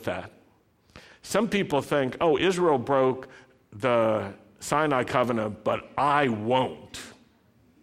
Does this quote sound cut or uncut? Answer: uncut